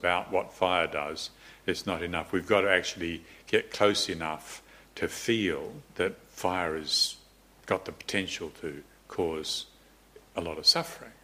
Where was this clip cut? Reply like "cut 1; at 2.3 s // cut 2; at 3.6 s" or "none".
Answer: cut 1; at 5.9 s

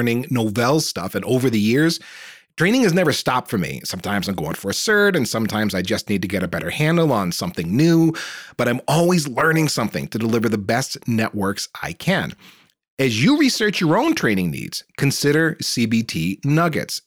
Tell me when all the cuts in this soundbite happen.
none

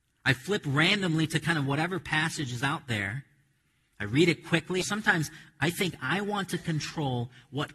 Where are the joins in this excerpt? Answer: cut 1; at 4.8 s

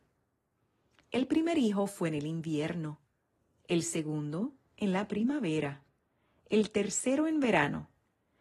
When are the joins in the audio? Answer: none

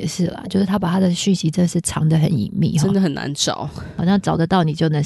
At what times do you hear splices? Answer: none

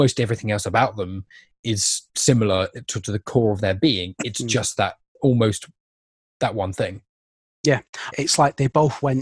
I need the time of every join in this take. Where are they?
cut 1; at 8.1 s

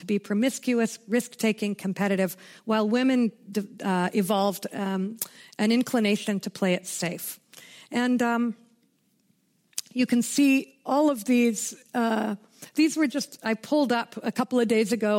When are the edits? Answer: none

